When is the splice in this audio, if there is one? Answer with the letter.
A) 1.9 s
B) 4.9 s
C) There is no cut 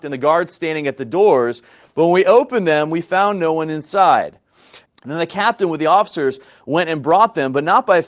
B